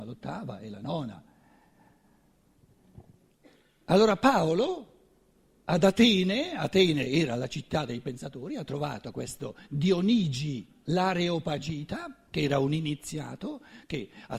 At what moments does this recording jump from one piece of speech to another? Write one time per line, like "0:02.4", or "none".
none